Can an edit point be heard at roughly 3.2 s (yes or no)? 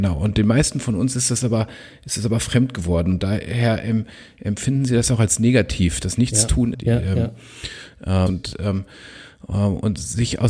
no